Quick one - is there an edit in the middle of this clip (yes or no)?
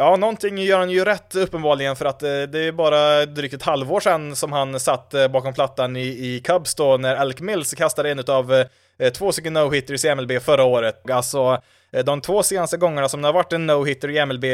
yes